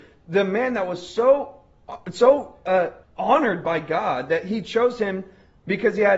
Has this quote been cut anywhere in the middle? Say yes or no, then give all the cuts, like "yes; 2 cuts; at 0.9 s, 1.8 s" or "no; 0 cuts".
yes; 1 cut; at 3.0 s